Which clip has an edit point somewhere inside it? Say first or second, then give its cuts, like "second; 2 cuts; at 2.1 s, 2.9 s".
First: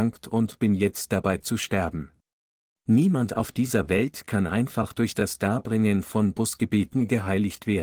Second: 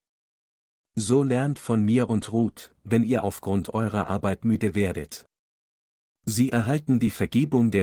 first; 1 cut; at 2.8 s